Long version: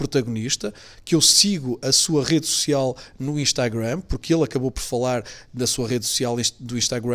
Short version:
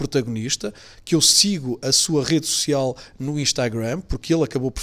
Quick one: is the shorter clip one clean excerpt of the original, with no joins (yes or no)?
yes